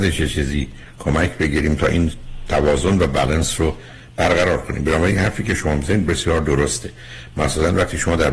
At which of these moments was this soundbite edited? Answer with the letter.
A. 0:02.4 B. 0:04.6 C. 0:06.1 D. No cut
C